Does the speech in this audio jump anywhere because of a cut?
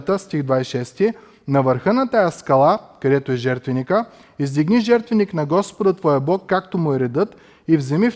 no; 0 cuts

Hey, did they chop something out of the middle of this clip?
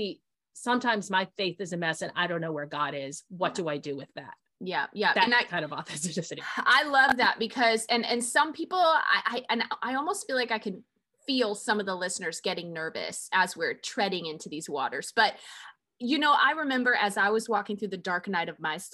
no; 0 cuts

